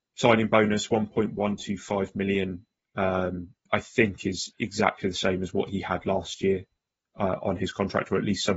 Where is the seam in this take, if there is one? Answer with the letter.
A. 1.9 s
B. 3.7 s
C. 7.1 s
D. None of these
B